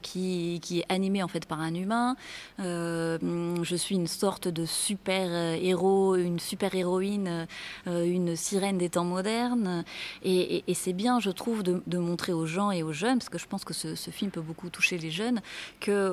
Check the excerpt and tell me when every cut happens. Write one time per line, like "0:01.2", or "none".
none